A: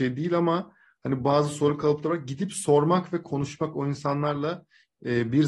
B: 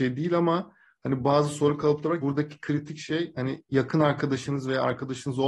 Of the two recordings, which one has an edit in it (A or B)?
B